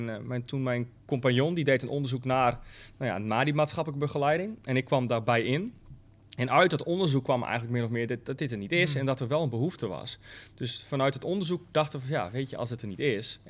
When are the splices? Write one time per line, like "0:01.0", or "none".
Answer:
none